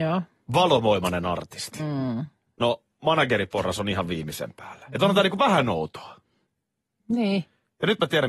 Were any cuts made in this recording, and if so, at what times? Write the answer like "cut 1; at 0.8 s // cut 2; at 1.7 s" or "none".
cut 1; at 4.9 s

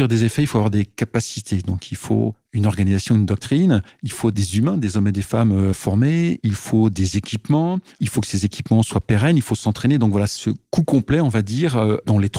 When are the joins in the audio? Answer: none

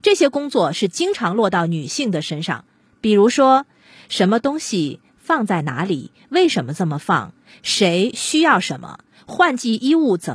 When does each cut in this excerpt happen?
none

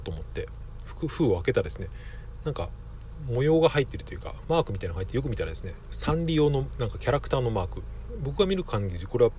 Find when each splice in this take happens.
cut 1; at 4.4 s // cut 2; at 5.9 s

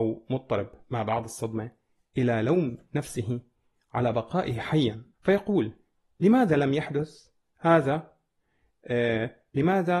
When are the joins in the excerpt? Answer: cut 1; at 5.1 s

